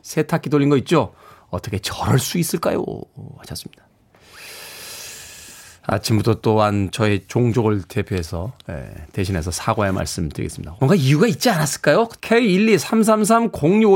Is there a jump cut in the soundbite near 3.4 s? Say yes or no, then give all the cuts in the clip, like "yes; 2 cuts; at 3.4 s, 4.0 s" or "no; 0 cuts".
no; 2 cuts; at 10.8 s, 12.2 s